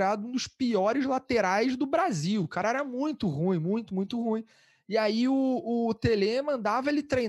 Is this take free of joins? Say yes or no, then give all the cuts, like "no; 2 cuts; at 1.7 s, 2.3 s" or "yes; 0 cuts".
yes; 0 cuts